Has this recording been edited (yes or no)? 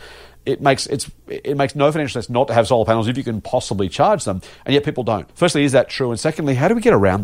yes